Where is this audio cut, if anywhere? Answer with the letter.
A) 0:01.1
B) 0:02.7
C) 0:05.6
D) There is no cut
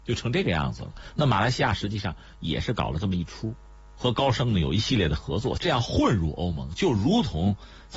C